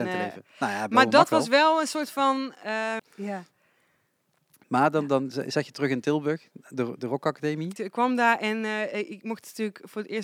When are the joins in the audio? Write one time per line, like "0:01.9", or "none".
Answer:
0:03.0
0:07.8